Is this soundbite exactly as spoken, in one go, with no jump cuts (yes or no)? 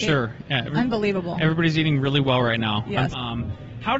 no